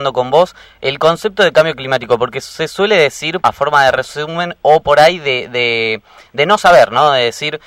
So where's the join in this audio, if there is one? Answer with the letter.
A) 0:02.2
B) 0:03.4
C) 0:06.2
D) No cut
B